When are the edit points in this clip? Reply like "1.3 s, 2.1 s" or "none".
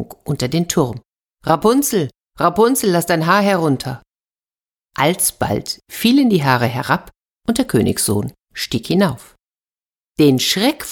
none